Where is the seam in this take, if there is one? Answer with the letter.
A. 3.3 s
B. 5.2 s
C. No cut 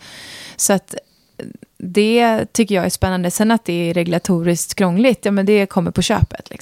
C